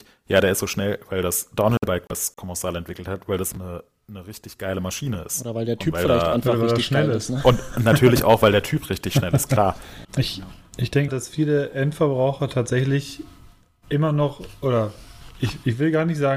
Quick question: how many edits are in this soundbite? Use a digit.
3